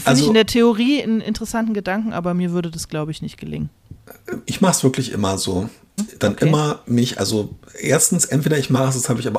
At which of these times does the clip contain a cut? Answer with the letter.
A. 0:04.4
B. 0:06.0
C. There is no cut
B